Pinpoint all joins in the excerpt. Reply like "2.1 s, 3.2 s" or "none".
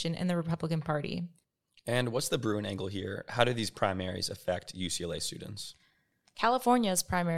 6.3 s

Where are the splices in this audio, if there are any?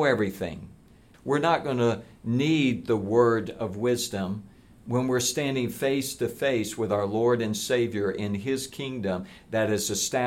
1.1 s

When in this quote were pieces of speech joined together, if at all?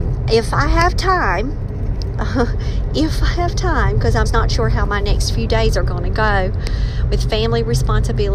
2.1 s, 4.3 s

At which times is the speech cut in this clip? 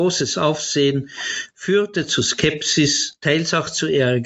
none

